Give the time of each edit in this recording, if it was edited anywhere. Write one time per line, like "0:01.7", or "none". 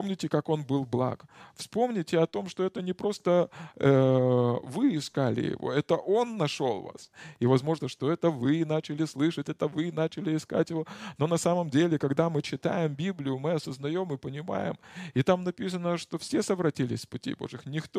0:07.8